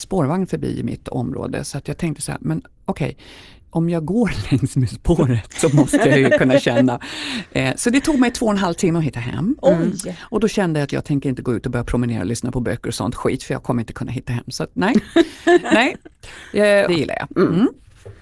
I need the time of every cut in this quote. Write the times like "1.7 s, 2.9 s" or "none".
16.9 s